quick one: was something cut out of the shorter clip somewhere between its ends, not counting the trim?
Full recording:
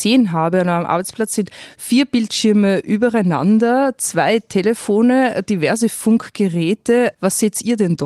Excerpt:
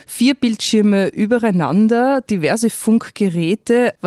yes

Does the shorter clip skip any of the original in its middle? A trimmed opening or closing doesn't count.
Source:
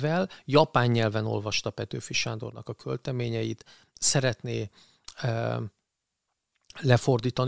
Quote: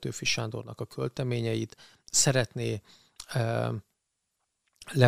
no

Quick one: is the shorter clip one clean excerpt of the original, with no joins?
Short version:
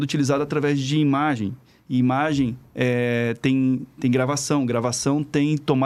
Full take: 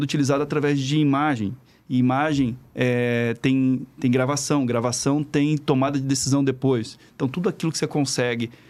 yes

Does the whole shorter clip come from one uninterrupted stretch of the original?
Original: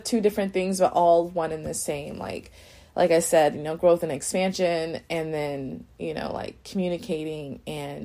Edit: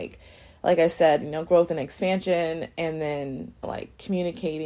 no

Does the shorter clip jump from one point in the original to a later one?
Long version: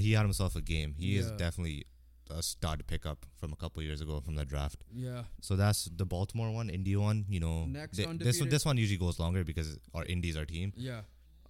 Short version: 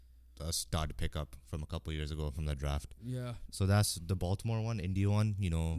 no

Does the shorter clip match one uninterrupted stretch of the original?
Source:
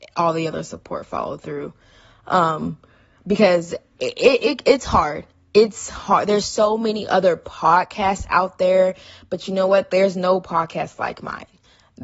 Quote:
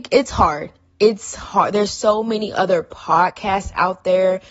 yes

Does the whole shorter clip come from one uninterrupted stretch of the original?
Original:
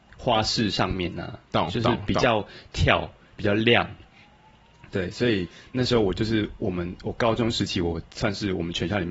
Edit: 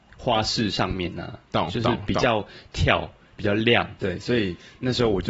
no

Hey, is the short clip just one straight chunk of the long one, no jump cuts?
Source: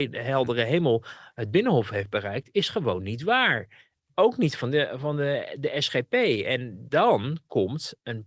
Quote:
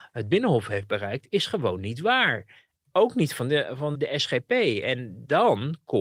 no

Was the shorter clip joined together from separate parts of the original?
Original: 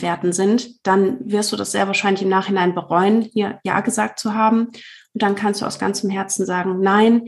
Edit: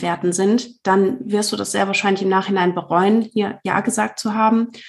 no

